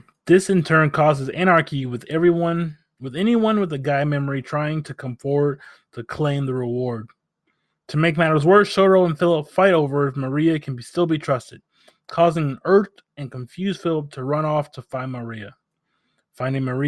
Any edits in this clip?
no; 0 cuts

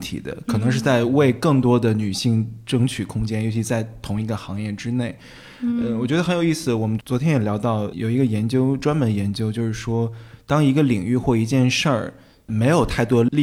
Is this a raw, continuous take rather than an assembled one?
no; 1 cut; at 7.0 s

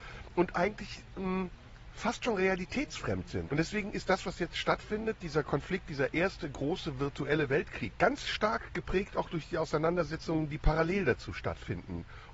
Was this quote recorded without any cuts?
no; 2 cuts; at 3.5 s, 7.9 s

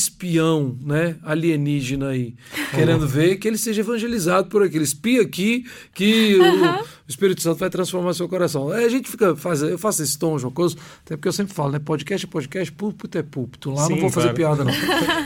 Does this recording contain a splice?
no; 0 cuts

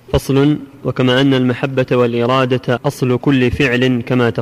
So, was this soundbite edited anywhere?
yes; 1 cut; at 2.8 s

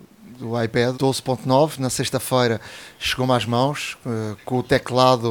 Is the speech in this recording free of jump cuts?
no; 1 cut; at 0.9 s

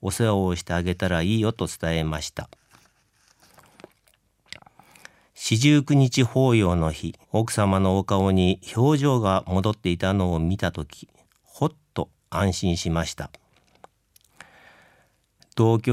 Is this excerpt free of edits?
no; 1 cut; at 7.2 s

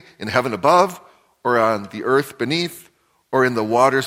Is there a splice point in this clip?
no; 0 cuts

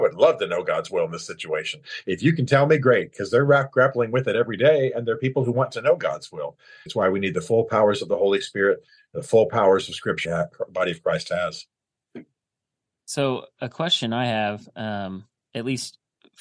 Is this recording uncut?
no; 2 cuts; at 6.9 s, 10.2 s

